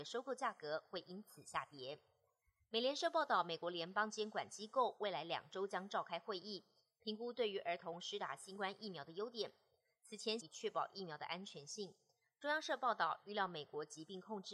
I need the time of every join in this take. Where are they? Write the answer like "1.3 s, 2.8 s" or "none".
10.4 s